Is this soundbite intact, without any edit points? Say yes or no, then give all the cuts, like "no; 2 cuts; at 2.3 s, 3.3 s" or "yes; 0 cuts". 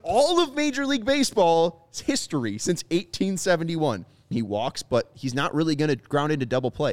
no; 1 cut; at 4.3 s